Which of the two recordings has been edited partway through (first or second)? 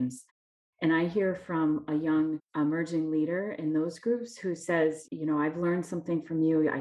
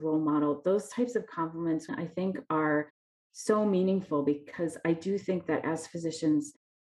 second